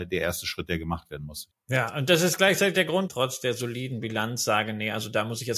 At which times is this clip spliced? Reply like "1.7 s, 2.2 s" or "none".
1.5 s, 3.1 s